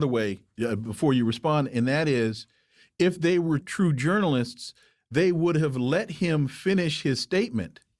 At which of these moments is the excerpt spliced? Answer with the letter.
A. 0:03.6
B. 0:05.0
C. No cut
A